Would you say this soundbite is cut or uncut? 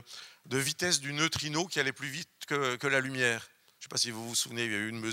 uncut